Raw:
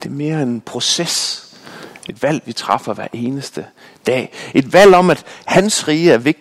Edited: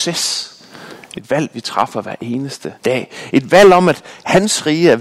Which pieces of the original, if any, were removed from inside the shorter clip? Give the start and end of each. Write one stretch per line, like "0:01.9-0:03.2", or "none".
0:03.7-0:04.0